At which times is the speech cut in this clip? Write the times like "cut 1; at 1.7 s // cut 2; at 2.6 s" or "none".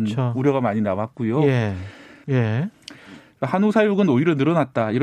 cut 1; at 2.2 s

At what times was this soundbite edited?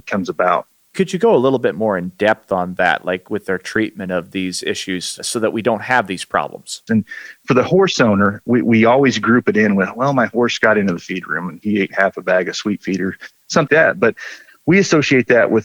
cut 1; at 6.9 s // cut 2; at 13.7 s

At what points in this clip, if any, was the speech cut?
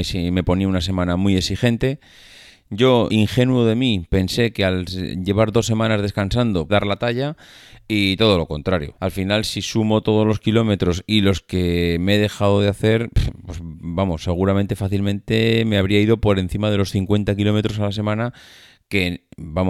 cut 1; at 3.1 s // cut 2; at 6.7 s // cut 3; at 9.0 s

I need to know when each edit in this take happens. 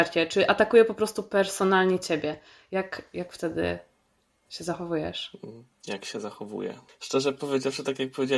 cut 1; at 6.9 s

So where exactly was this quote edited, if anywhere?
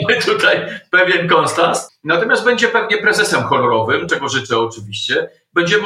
cut 1; at 1.9 s // cut 2; at 4.1 s

